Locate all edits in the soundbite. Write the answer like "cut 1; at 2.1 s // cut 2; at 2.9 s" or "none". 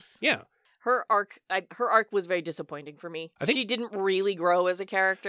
cut 1; at 1.7 s // cut 2; at 3.4 s